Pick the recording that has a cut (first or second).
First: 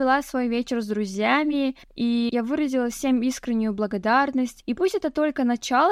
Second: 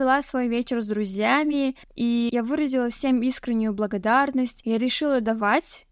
first